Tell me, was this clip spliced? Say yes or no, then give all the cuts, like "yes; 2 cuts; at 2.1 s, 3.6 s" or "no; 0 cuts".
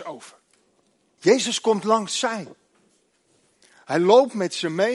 yes; 1 cut; at 1.2 s